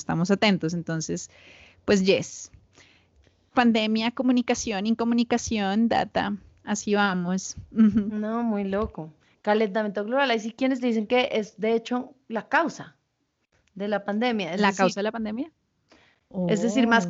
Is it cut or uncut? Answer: uncut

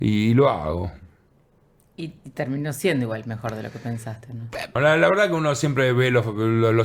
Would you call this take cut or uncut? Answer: cut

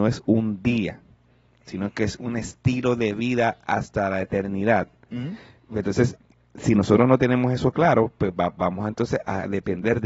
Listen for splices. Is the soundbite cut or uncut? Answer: uncut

